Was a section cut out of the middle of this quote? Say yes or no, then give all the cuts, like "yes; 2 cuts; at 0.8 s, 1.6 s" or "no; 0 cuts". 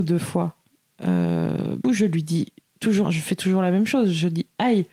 yes; 2 cuts; at 1.8 s, 3.0 s